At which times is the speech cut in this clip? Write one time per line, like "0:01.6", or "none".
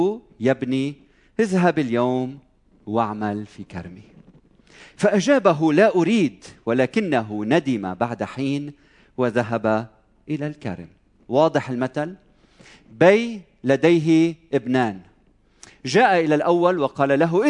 none